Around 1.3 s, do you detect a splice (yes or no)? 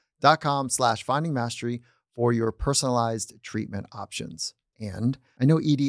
no